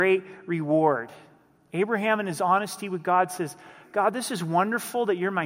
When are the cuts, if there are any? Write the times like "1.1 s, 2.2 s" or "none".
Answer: none